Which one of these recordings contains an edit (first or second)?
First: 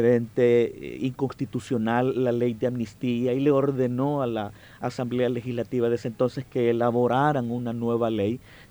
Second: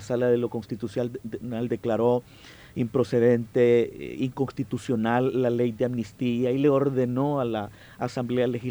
second